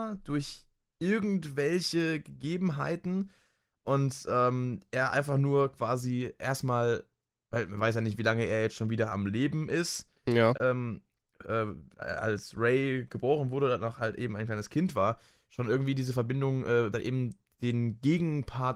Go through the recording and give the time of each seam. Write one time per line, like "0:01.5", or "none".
0:10.5
0:16.9